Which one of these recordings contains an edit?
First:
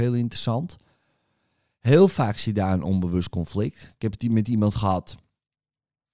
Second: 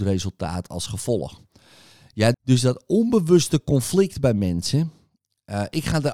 second; 1 cut; at 2.3 s

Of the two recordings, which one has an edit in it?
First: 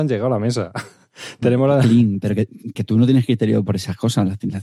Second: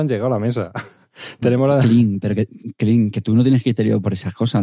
first; 1 cut; at 2.8 s

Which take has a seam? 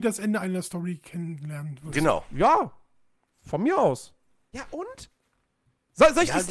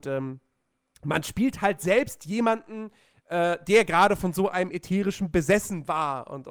first; 1 cut; at 4.5 s

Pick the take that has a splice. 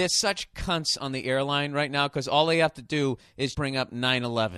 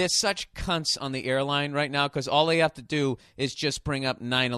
first; 1 cut; at 3.5 s

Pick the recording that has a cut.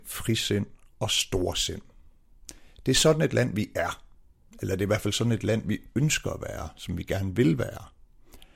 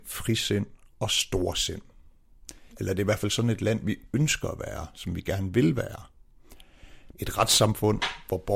second; 2 cuts; at 2.7 s, 7.1 s

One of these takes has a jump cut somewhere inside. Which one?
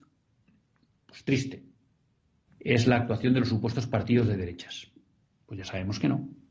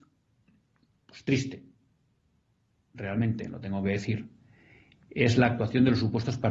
first; 2 cuts; at 2.5 s, 5.2 s

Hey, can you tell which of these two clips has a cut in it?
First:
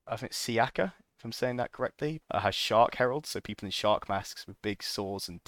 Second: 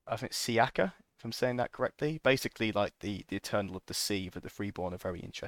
first; 1 cut; at 2.2 s

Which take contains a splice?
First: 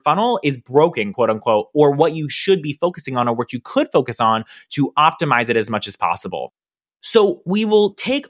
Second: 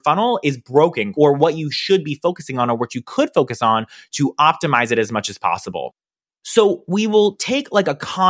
second; 1 cut; at 1.1 s

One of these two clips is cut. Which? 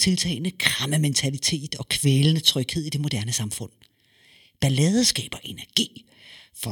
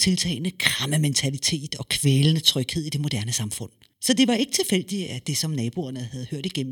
second; 1 cut; at 3.9 s

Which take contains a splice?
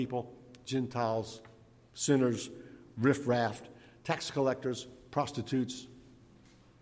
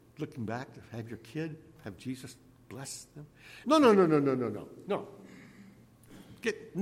second; 1 cut; at 3.6 s

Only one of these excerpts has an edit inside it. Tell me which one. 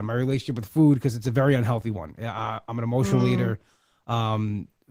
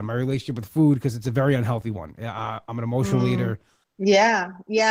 second; 1 cut; at 3.8 s

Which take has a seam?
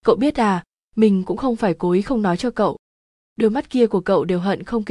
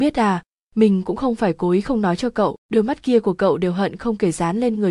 second; 1 cut; at 2.6 s

